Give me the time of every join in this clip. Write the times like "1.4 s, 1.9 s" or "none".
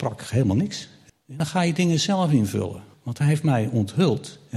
1.1 s, 2.9 s